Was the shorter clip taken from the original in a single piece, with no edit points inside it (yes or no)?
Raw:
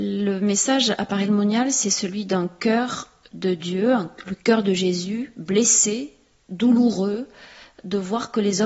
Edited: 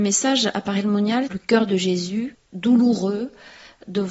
no